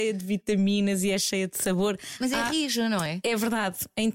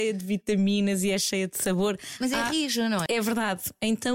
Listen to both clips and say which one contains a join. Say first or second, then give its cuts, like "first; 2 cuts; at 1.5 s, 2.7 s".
second; 1 cut; at 3.1 s